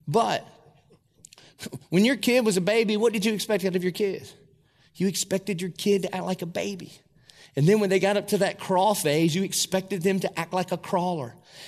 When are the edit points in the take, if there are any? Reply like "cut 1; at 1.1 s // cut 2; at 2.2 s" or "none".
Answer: none